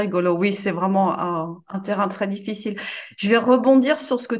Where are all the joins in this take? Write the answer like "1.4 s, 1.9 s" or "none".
2.1 s